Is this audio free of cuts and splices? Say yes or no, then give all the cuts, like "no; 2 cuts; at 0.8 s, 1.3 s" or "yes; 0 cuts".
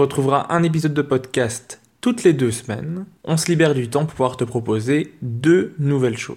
yes; 0 cuts